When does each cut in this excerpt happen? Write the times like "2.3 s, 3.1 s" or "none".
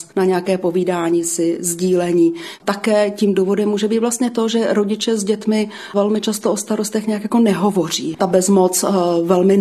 8.1 s